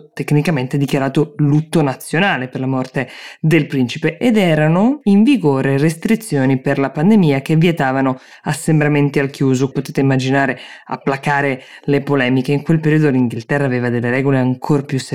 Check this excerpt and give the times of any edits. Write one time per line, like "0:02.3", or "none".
0:09.7

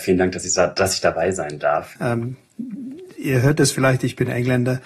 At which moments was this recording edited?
0:02.0

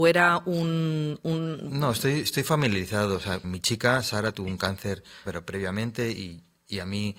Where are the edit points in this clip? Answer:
0:03.4
0:05.3

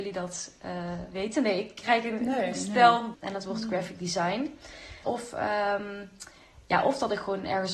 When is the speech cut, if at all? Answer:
0:03.1
0:05.0

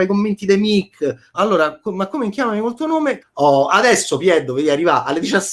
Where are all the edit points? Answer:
0:01.3
0:03.2

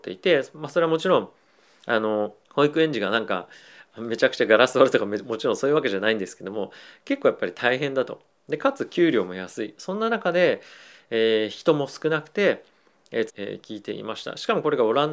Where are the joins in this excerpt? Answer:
0:02.4
0:13.3

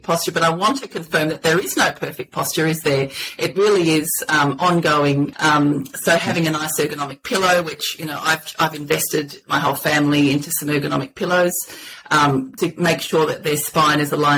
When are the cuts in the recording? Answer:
0:05.3
0:12.6

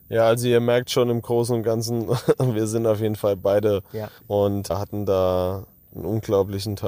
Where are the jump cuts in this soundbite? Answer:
0:04.2

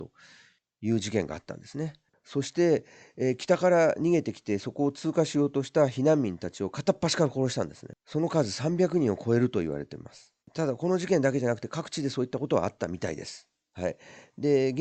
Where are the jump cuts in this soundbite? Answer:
0:02.1
0:10.4

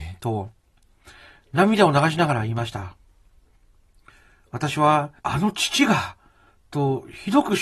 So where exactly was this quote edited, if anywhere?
0:05.2

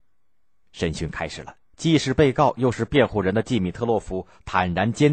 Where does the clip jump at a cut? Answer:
0:01.7

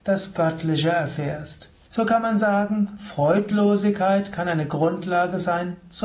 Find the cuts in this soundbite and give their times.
0:01.9

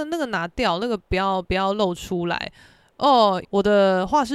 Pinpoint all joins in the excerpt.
0:03.4

